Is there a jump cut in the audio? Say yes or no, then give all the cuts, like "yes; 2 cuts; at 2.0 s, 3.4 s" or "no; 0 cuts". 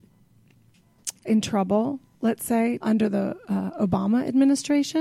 yes; 2 cuts; at 1.2 s, 2.8 s